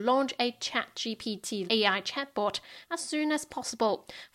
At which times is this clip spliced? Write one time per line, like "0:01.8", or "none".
0:01.7

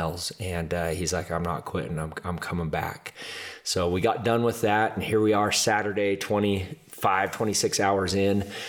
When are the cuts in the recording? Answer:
none

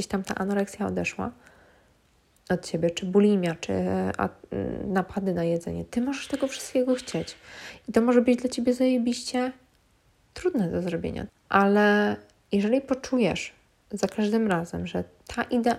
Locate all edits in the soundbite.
0:11.3

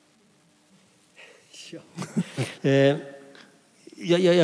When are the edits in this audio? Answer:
0:02.6

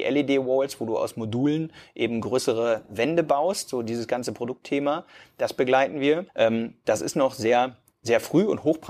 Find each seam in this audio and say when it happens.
0:06.3

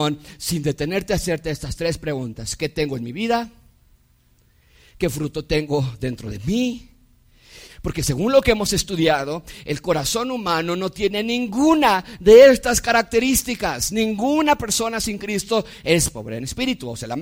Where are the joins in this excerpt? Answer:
0:07.7

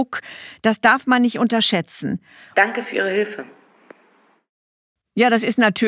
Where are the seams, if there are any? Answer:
0:02.5

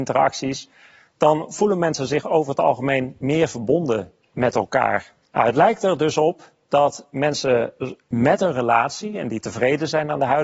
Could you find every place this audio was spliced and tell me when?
none

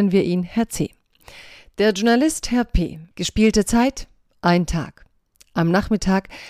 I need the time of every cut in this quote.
0:03.1

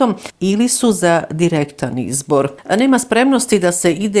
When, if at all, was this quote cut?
none

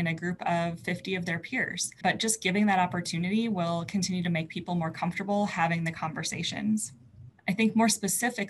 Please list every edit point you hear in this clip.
0:07.4

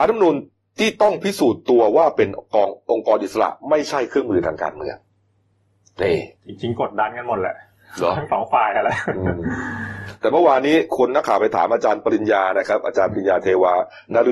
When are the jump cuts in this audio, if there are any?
0:06.4
0:11.1

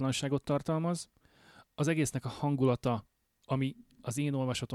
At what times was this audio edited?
none

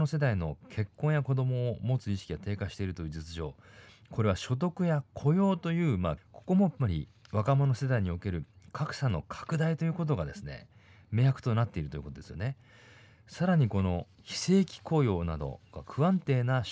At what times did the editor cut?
0:06.2

